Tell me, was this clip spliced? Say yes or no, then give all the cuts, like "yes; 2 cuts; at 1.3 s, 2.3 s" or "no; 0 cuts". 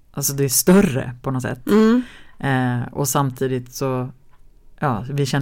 no; 0 cuts